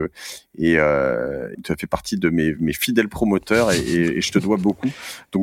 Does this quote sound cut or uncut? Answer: cut